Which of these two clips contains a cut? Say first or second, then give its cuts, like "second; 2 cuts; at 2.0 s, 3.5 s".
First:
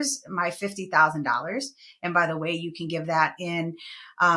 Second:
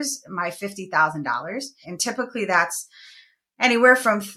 second; 1 cut; at 1.8 s